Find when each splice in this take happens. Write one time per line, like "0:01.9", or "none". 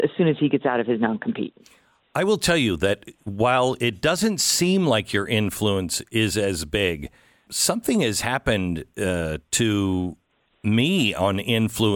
0:07.5